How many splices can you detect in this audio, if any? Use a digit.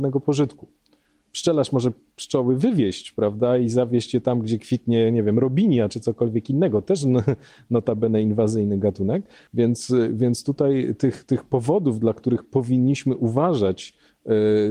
1